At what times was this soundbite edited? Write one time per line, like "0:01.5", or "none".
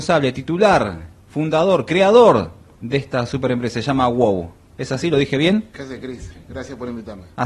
0:02.7